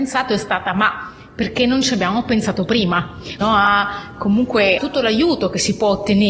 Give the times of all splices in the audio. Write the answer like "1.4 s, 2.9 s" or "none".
3.4 s, 4.8 s